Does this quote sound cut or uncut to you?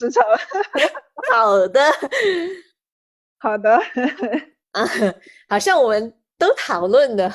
uncut